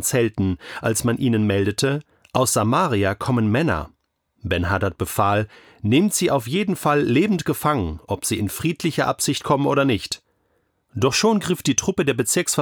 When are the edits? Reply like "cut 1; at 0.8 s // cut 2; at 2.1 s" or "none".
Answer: none